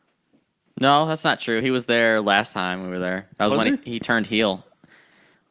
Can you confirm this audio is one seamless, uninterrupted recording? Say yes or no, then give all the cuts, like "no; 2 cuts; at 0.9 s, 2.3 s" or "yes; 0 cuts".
yes; 0 cuts